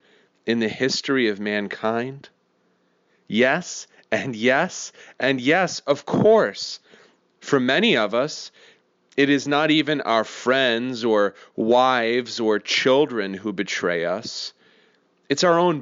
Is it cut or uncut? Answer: uncut